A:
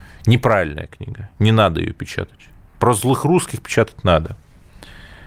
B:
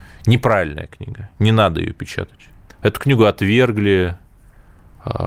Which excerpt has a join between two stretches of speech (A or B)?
B